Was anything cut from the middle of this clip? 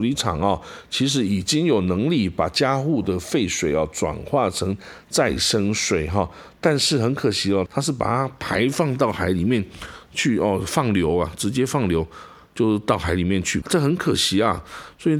yes; 2 cuts; at 7.7 s, 13.6 s

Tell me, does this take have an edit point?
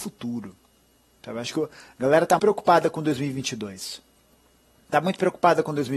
yes; 1 cut; at 2.4 s

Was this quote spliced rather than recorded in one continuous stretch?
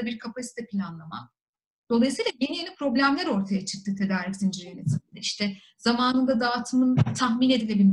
yes; 1 cut; at 1.9 s

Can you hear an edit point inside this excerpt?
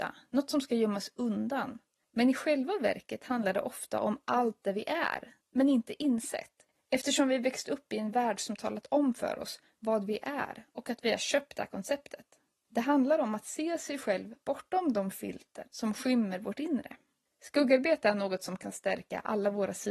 no; 0 cuts

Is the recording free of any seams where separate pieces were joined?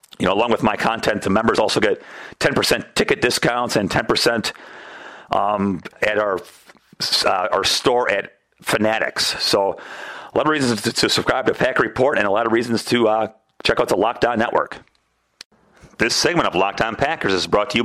yes; 0 cuts

